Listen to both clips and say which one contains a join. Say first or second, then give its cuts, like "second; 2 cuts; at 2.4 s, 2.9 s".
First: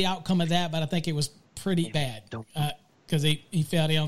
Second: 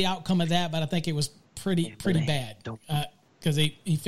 first; 1 cut; at 1.9 s